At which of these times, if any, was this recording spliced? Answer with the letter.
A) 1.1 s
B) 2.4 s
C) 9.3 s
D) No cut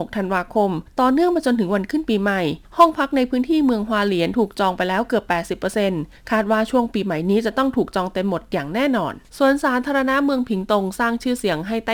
C